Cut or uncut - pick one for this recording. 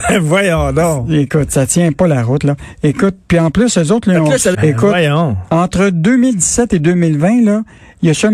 cut